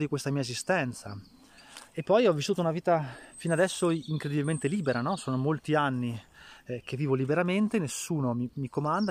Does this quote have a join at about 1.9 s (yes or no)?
yes